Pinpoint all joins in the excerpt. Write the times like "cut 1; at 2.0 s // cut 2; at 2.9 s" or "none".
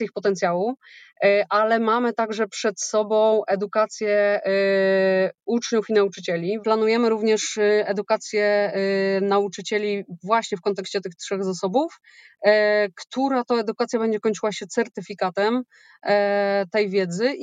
cut 1; at 6.6 s